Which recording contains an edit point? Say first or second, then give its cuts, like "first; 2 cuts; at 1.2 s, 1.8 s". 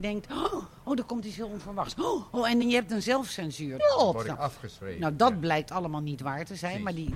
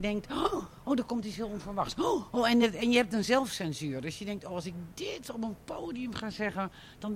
first; 2 cuts; at 2.6 s, 3.8 s